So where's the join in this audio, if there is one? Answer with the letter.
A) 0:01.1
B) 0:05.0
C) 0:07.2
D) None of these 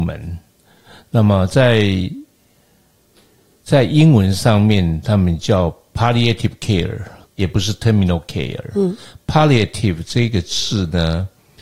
C